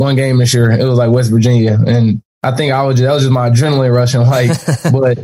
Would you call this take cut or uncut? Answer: cut